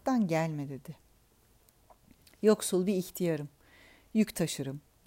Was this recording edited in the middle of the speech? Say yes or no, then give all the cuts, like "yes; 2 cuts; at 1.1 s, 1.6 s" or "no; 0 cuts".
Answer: no; 0 cuts